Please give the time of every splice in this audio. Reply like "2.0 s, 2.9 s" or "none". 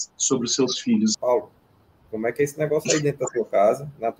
1.1 s